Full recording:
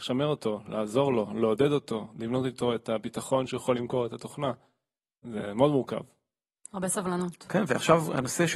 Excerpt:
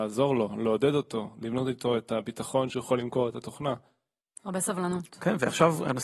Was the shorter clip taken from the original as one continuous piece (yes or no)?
no